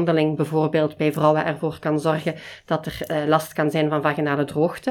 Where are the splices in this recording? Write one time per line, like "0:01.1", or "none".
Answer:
none